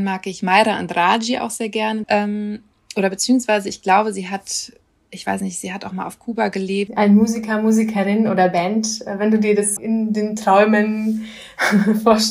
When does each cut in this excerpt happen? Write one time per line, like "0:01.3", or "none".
0:02.0
0:06.9
0:09.8